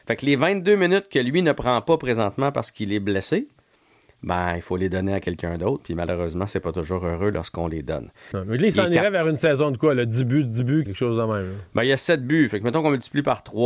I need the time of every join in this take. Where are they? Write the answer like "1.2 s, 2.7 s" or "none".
8.3 s, 10.9 s